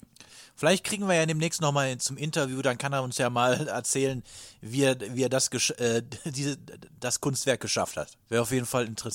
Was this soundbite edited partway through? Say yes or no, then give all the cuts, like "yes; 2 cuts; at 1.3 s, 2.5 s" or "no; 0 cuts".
yes; 1 cut; at 8.2 s